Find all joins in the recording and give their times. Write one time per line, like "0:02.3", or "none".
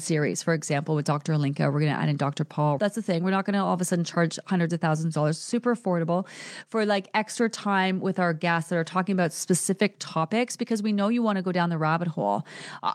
0:02.8